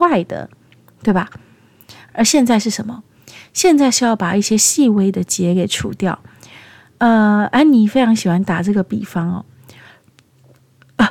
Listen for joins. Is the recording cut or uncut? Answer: cut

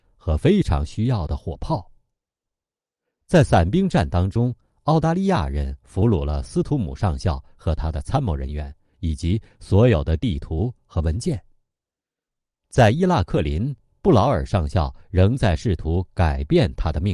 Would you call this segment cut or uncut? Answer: uncut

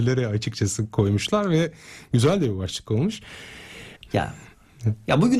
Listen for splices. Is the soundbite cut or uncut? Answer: cut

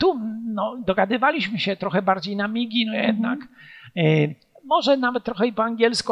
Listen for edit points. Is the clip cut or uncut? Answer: uncut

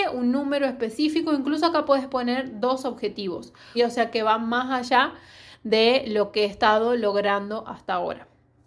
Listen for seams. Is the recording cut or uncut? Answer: cut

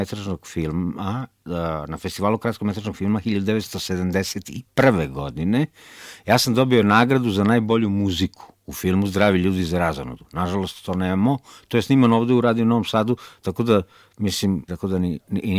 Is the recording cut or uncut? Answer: cut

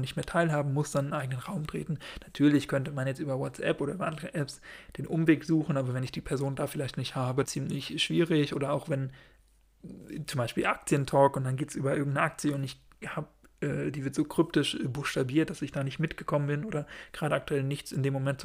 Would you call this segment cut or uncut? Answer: cut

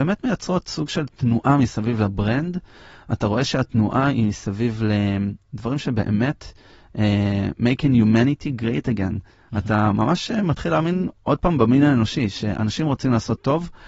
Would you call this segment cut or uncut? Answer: uncut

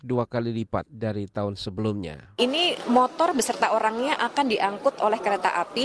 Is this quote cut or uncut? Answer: uncut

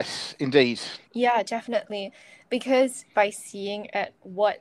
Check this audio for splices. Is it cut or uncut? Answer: cut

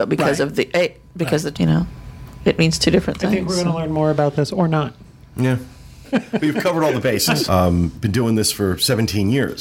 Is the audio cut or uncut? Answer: cut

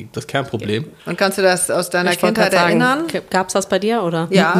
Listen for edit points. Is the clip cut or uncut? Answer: cut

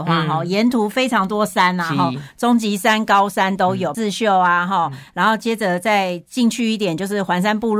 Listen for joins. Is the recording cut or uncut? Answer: cut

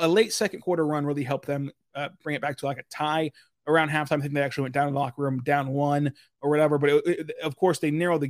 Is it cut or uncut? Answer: uncut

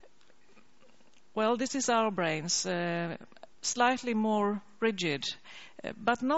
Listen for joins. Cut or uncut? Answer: cut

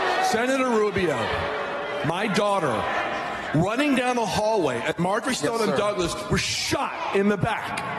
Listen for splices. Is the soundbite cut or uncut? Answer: uncut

